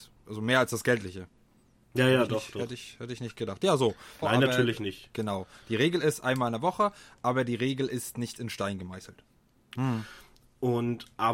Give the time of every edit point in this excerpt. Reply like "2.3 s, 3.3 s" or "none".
4.2 s, 9.8 s